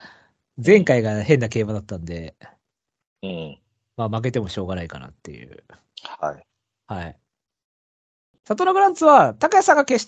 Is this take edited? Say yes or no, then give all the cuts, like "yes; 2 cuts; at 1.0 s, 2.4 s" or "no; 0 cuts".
no; 0 cuts